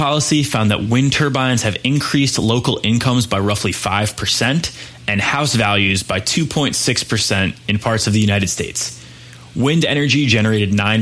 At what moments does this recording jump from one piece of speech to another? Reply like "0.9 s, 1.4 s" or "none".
none